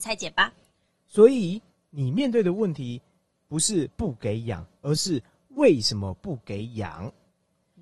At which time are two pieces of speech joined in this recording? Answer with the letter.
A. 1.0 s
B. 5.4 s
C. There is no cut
A